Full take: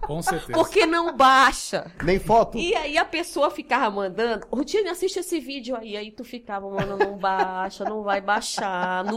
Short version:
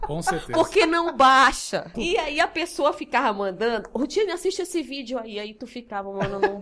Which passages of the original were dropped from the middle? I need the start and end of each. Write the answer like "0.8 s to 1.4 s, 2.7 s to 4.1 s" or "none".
1.9 s to 2.5 s